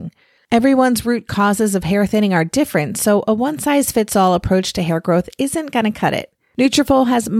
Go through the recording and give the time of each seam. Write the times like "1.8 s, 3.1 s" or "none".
none

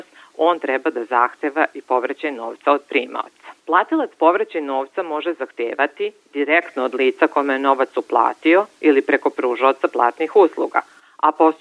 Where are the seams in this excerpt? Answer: 3.6 s

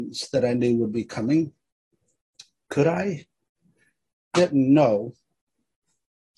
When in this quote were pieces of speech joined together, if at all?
4.3 s

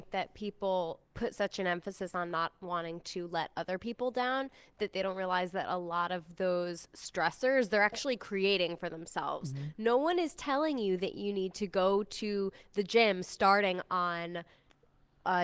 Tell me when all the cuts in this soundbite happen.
1.1 s

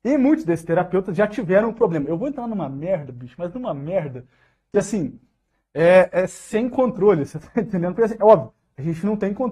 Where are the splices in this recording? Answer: none

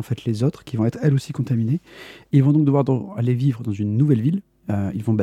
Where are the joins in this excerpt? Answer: 2.3 s

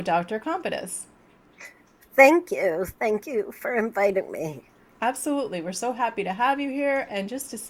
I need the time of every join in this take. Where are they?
none

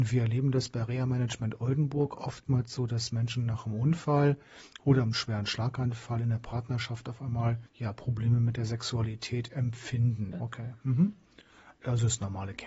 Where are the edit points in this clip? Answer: 7.7 s, 10.3 s

